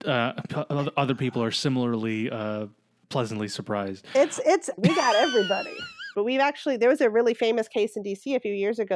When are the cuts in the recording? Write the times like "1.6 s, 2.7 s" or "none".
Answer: 4.8 s, 6.1 s